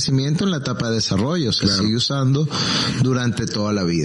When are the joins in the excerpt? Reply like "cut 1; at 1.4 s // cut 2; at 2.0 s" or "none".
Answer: none